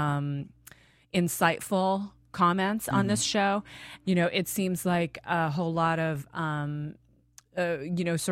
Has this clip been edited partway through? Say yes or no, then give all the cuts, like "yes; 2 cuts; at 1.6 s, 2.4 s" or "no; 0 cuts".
yes; 1 cut; at 4.0 s